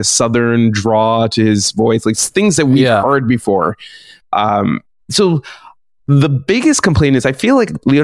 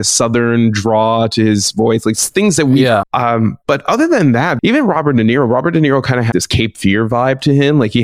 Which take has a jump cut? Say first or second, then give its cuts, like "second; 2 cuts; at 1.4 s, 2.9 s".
second; 3 cuts; at 3.0 s, 4.6 s, 6.3 s